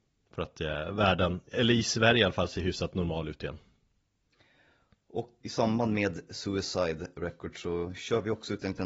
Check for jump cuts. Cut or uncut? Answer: cut